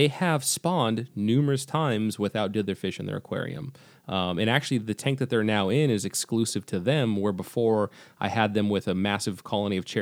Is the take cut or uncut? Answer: uncut